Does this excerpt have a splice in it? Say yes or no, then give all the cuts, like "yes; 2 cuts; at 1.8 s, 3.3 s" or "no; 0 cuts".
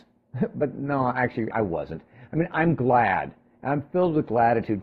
yes; 1 cut; at 1.5 s